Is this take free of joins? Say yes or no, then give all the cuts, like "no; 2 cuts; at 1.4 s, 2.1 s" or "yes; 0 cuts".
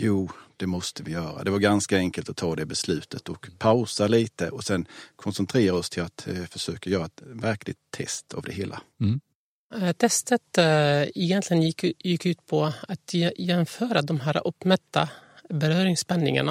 yes; 0 cuts